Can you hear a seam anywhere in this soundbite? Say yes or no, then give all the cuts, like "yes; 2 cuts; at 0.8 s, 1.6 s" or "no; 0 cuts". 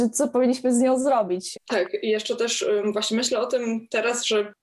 yes; 1 cut; at 1.5 s